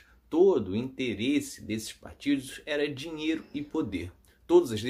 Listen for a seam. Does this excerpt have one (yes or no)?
no